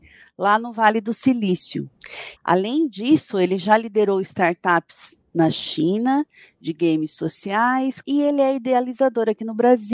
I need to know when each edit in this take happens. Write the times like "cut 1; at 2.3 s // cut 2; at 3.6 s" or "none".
cut 1; at 2.4 s // cut 2; at 8.0 s